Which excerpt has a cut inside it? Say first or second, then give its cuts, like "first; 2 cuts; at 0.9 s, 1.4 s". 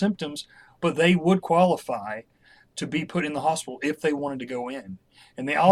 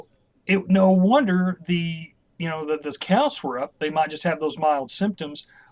second; 1 cut; at 3.7 s